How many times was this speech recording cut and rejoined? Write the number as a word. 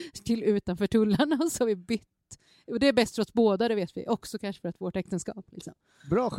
zero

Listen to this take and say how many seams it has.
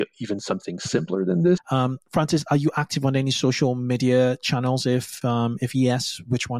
two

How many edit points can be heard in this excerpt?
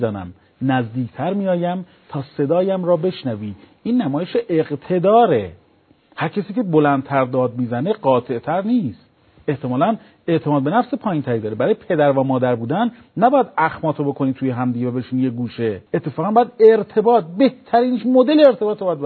one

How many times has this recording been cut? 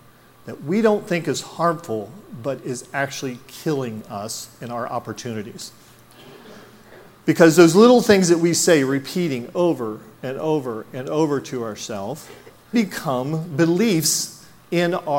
one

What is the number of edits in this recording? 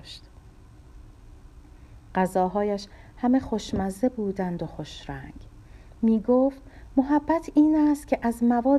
zero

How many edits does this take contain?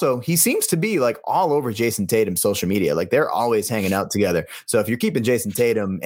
zero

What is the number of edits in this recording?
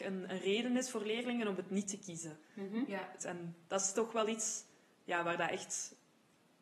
one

